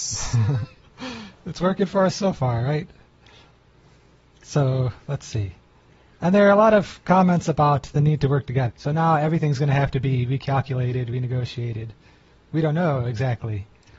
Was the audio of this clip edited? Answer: yes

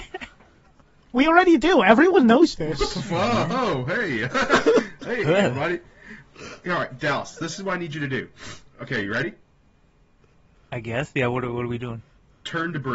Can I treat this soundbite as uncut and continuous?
yes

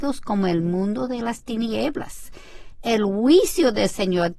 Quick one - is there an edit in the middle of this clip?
no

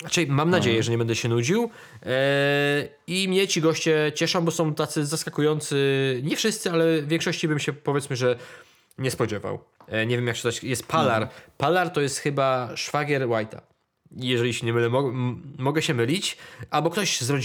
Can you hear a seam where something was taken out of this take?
yes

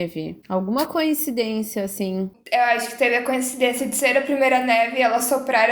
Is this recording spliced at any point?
no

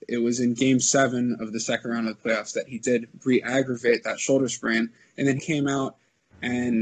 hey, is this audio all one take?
no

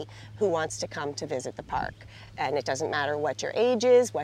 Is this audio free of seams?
yes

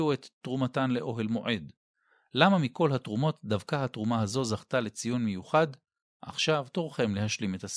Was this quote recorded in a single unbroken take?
yes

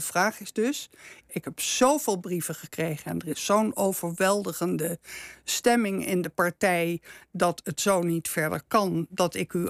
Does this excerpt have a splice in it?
yes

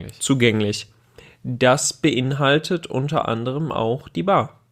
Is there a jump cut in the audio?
no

